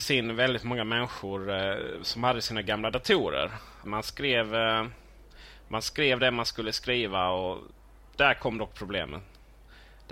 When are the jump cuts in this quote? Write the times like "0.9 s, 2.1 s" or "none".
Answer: 3.9 s